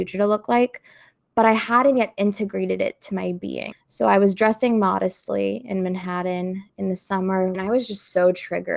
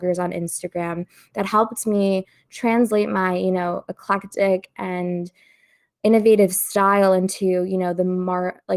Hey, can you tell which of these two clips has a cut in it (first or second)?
first